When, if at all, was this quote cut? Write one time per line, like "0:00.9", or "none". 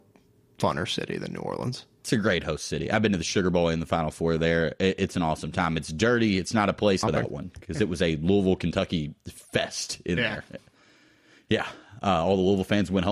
0:07.0